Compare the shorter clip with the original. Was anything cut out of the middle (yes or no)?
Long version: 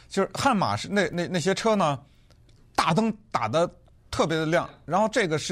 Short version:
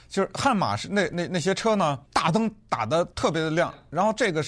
yes